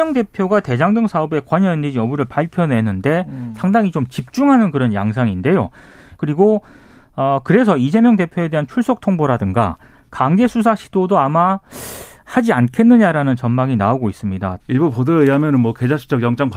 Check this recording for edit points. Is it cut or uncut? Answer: cut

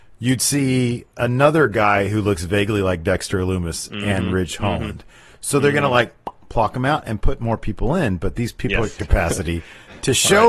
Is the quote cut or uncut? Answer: cut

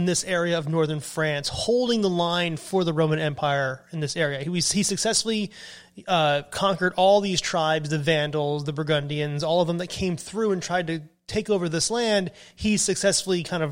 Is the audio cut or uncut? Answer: uncut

